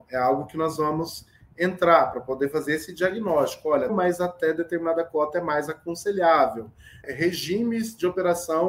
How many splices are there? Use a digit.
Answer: 2